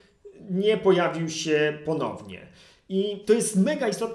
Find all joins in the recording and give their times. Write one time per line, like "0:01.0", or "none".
none

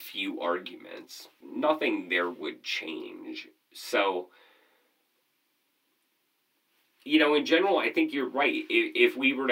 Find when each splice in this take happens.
0:01.4

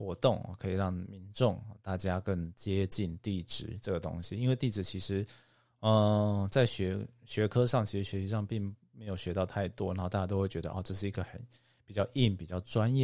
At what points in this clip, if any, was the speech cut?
none

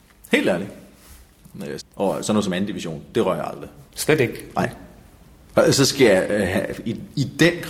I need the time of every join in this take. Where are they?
0:01.8
0:03.9

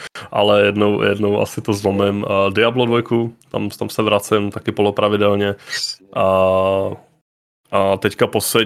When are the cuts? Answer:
none

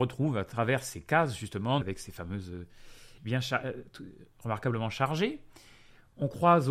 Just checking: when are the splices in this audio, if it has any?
0:01.8
0:03.2

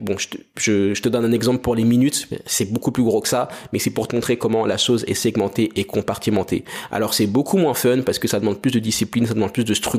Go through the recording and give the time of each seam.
none

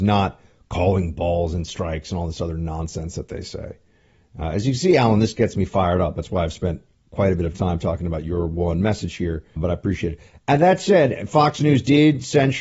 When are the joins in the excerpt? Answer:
0:09.6

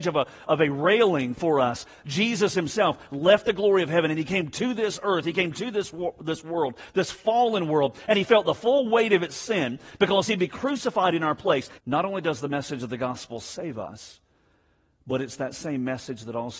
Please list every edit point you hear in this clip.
0:11.8

